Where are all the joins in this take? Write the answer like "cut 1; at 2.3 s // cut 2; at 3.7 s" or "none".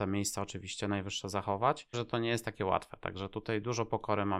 cut 1; at 1.9 s